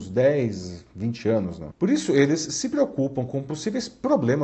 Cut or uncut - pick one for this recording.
cut